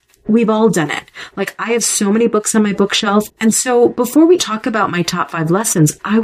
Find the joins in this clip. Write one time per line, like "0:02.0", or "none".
0:03.3
0:04.4